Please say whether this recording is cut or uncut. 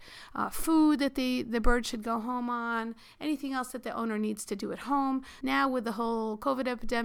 cut